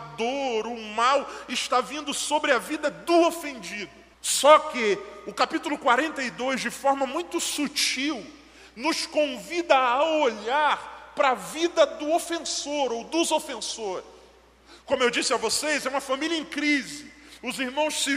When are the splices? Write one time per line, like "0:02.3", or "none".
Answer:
0:04.1